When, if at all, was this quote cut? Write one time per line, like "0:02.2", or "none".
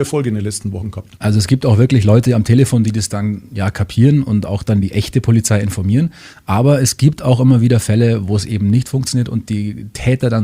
none